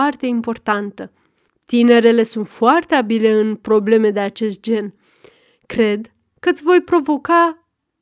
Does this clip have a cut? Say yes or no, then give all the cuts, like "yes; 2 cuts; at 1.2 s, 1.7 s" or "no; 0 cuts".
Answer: yes; 1 cut; at 1.5 s